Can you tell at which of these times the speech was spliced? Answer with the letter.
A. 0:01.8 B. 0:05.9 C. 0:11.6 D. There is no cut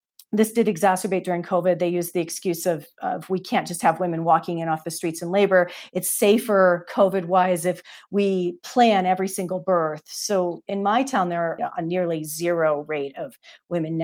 C